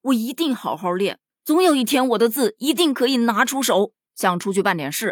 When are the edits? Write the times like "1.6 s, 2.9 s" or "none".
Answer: 4.1 s